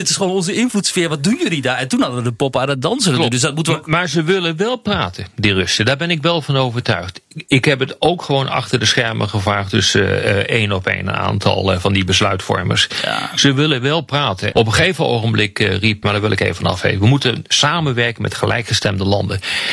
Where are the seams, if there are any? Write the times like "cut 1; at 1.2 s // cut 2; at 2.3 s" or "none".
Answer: cut 1; at 14.5 s // cut 2; at 16.0 s